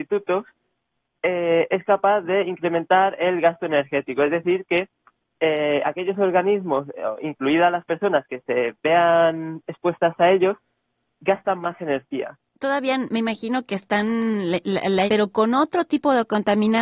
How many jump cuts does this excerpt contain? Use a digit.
2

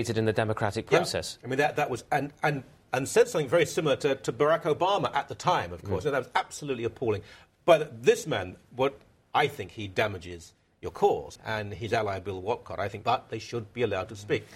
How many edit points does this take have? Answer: 3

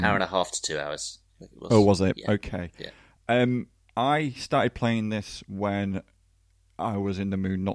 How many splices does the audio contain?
0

